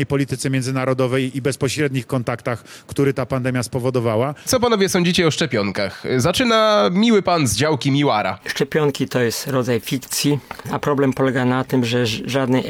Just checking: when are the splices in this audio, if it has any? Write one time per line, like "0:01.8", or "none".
0:04.5
0:10.6